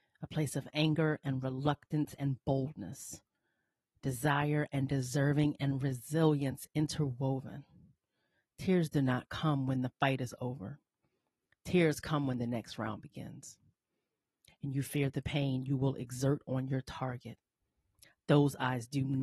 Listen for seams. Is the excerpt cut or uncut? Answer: uncut